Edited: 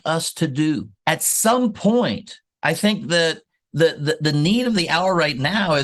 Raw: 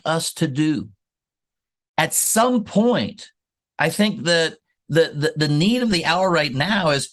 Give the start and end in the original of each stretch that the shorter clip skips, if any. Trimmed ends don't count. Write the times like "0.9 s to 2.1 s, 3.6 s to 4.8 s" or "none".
1.0 s to 1.9 s, 3.4 s to 3.7 s